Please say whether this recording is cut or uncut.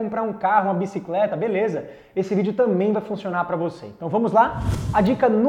uncut